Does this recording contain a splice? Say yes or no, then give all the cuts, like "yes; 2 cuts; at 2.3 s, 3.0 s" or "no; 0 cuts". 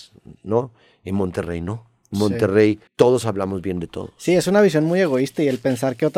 yes; 1 cut; at 2.9 s